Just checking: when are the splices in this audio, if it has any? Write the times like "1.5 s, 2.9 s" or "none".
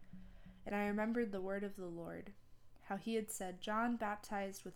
none